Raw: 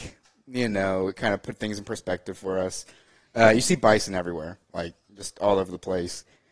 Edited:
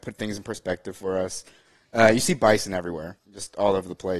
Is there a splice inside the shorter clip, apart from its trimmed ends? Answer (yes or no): yes